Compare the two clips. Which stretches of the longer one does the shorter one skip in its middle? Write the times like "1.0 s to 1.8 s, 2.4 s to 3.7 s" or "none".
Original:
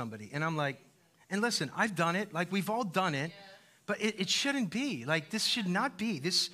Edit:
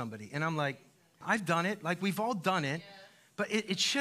1.2 s to 1.7 s

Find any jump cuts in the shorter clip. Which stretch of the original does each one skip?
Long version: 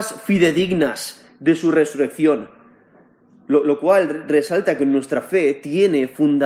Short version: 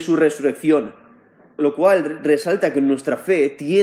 3.1 s to 3.6 s

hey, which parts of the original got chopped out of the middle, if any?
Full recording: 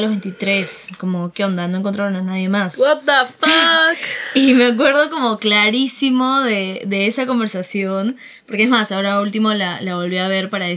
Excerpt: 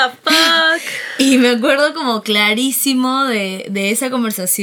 none

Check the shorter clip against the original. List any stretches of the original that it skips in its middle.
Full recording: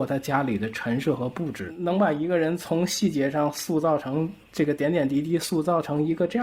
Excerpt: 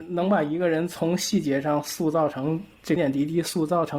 4.7 s to 4.9 s

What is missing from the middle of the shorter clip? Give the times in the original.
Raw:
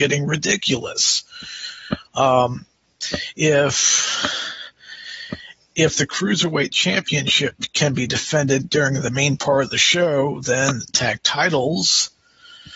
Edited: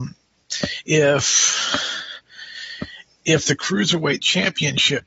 none

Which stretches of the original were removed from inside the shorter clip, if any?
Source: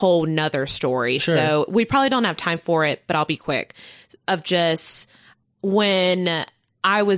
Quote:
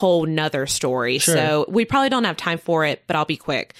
none

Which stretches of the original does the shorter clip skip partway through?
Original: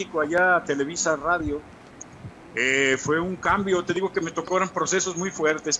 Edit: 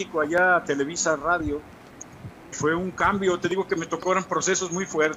2.5 s to 3.0 s

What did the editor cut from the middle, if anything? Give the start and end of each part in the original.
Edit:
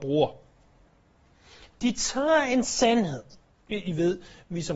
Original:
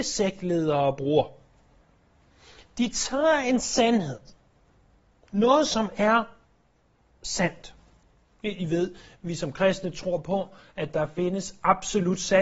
4.5 s to 8.3 s

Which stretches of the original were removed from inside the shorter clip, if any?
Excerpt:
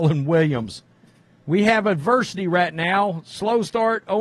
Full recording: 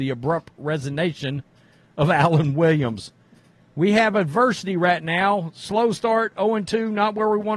none

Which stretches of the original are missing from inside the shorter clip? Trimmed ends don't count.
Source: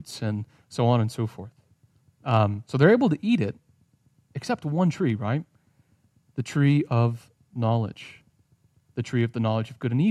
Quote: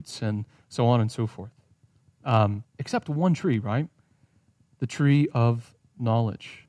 2.6 s to 4.2 s

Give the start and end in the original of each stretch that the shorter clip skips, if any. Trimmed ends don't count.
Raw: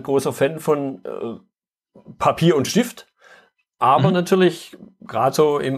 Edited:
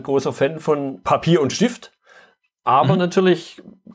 1.0 s to 2.2 s

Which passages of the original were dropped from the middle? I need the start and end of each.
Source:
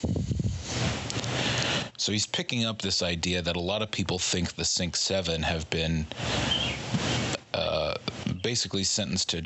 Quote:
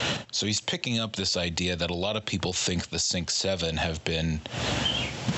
none

